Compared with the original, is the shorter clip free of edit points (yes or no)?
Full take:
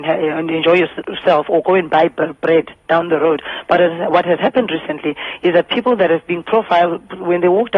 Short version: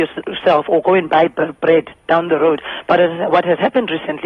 yes